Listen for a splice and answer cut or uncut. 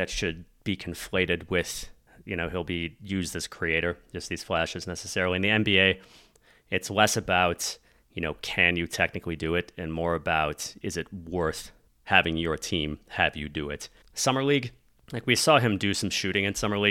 cut